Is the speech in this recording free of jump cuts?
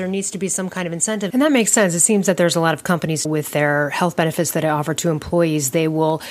no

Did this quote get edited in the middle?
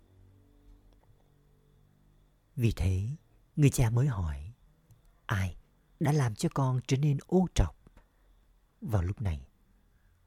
no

